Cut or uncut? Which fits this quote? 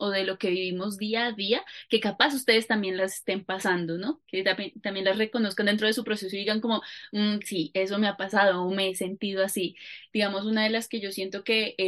uncut